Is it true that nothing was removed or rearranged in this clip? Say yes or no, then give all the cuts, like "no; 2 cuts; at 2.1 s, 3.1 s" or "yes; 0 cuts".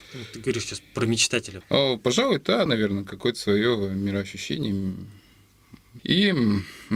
no; 3 cuts; at 1.6 s, 2.7 s, 6.0 s